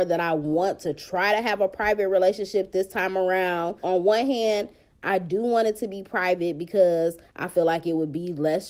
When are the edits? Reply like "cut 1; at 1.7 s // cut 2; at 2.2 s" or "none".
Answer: cut 1; at 3.8 s